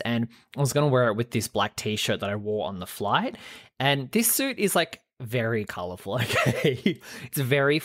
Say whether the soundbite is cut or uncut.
uncut